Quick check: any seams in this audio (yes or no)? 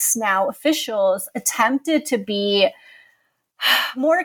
no